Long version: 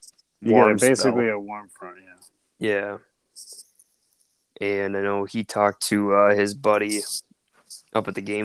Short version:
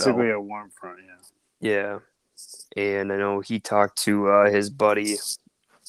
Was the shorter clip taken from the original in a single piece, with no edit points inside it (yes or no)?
no